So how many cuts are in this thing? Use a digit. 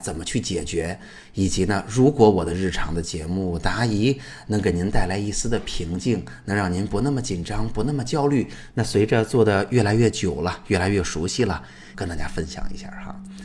2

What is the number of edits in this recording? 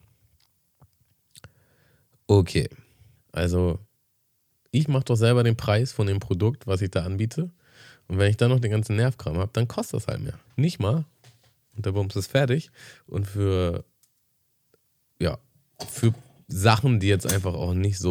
3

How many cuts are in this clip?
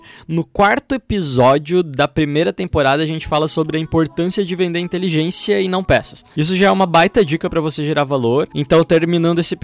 0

